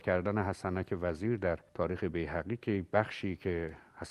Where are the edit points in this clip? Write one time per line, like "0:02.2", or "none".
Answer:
0:01.7